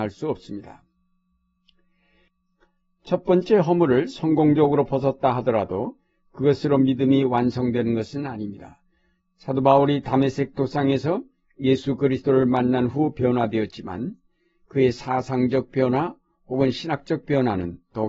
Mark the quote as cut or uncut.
uncut